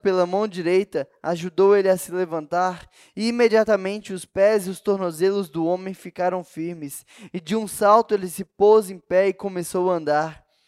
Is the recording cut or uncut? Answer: uncut